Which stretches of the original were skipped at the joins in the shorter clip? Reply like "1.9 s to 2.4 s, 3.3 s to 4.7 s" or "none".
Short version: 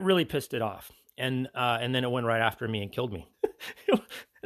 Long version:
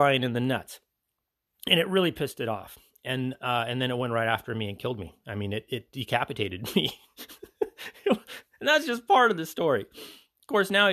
5.2 s to 7.5 s